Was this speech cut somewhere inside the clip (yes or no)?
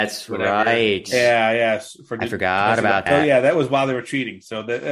yes